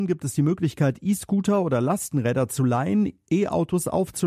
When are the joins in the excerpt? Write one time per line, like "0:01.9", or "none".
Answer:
none